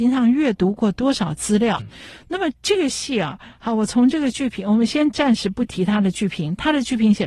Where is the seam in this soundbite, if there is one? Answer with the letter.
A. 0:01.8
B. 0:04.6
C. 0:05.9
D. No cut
A